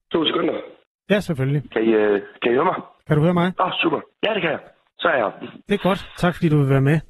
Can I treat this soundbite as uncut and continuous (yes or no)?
no